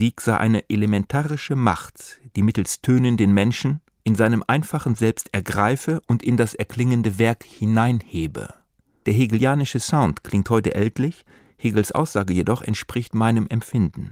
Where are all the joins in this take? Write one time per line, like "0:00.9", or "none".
0:04.0